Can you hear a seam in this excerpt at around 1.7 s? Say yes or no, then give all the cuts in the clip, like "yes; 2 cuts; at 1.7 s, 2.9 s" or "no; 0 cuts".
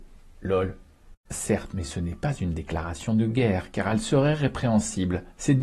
yes; 1 cut; at 1.7 s